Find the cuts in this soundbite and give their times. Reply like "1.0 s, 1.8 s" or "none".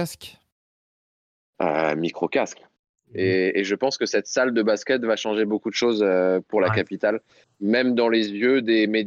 3.0 s

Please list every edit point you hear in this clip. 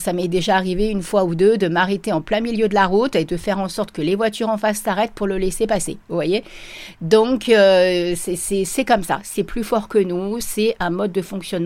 none

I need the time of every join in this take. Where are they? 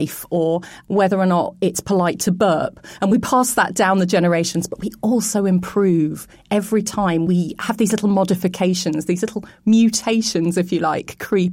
none

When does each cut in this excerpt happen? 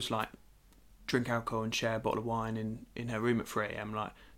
none

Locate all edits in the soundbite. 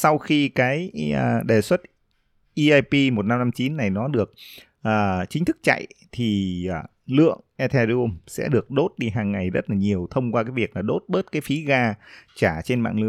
none

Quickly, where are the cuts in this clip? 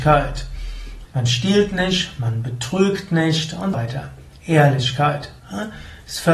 1.1 s, 3.7 s

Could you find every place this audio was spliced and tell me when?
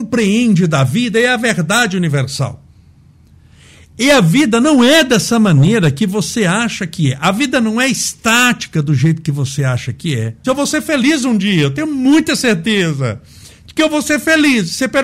10.4 s

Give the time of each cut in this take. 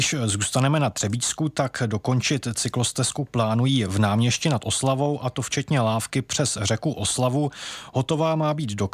none

